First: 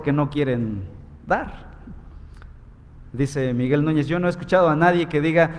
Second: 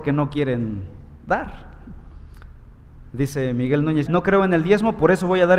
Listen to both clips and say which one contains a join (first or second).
second